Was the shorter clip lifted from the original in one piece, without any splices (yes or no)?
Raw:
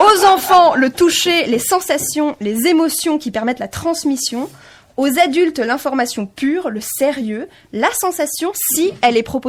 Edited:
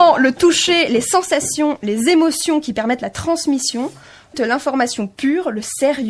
no